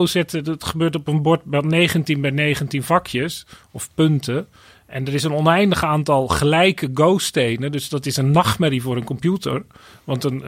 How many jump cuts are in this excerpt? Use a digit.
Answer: 0